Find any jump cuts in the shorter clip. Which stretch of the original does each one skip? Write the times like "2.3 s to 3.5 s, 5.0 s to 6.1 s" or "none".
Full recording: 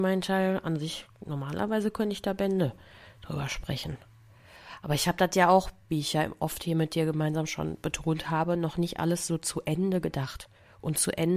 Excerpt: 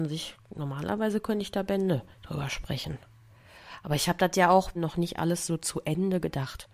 2.8 s to 3.1 s, 5.7 s to 8.6 s